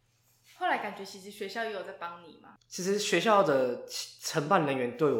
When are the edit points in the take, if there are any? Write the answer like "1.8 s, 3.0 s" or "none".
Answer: 2.6 s